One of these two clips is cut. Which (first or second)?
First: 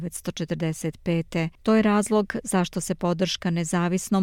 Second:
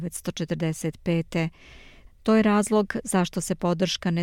first